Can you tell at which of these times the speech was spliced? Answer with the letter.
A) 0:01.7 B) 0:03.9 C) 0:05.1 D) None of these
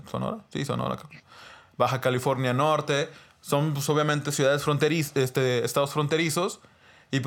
D